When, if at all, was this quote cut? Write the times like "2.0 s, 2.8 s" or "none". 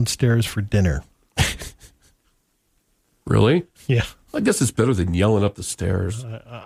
none

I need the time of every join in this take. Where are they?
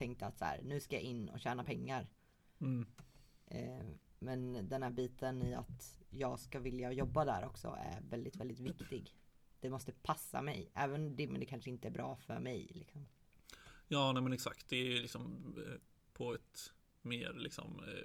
11.3 s

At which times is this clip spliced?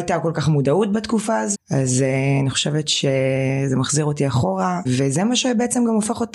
1.5 s, 4.8 s

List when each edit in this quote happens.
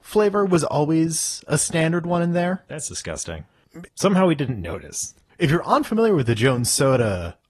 3.9 s

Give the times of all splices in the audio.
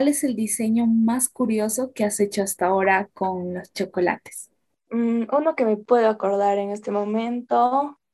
4.7 s

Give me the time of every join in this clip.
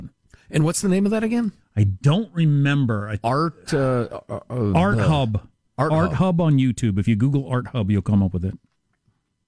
none

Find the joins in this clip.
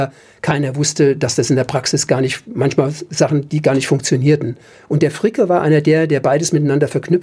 none

